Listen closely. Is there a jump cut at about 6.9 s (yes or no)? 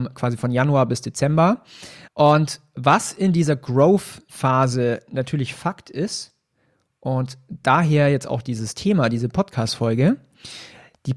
no